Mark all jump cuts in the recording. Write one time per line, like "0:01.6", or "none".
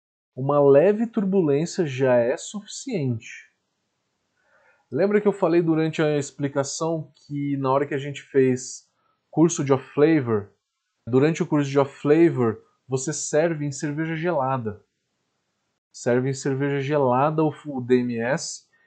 0:11.1